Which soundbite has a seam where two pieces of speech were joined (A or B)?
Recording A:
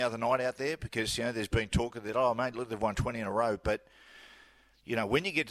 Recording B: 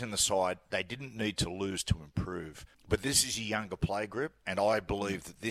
B